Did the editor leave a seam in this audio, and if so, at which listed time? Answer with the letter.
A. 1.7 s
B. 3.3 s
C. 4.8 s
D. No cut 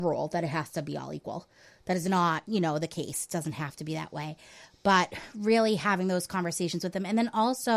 D